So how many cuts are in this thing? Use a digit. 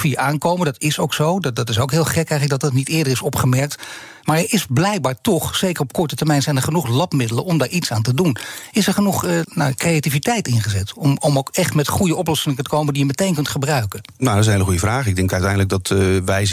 1